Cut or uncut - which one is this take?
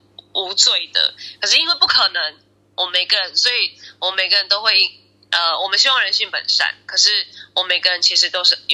uncut